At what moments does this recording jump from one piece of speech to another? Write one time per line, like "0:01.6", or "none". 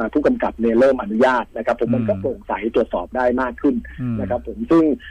none